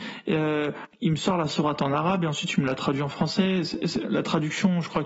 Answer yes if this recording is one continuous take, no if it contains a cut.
yes